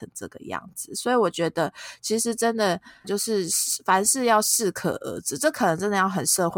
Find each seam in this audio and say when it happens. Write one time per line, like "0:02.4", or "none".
0:03.0